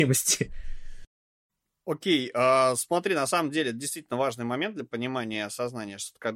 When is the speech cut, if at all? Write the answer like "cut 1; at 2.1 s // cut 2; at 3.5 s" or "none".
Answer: none